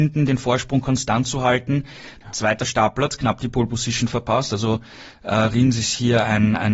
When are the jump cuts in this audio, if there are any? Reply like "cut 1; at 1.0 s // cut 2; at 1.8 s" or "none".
cut 1; at 2.2 s